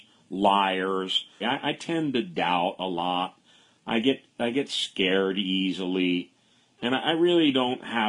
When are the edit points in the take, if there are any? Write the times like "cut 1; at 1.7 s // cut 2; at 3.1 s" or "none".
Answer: cut 1; at 1.4 s